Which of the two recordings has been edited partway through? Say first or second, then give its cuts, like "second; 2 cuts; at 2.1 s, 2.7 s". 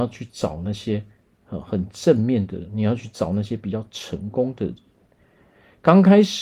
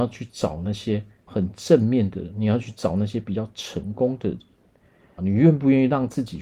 second; 2 cuts; at 1.3 s, 5.2 s